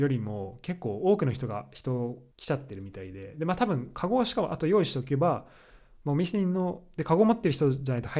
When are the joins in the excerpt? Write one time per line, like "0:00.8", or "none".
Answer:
0:02.3